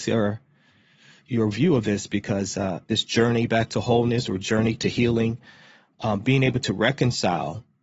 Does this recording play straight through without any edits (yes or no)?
no